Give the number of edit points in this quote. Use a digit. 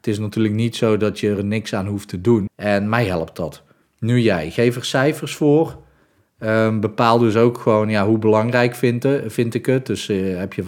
2